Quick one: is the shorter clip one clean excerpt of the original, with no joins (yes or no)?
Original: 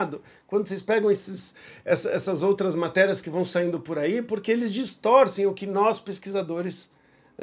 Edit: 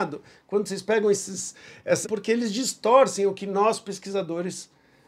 no